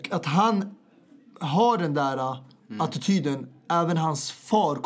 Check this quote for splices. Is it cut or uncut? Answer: uncut